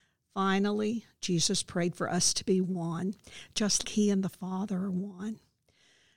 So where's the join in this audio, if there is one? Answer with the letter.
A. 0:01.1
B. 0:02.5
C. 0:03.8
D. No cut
C